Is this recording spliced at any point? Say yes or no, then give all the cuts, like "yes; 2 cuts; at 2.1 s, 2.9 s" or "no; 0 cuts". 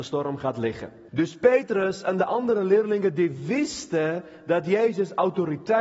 yes; 1 cut; at 1.1 s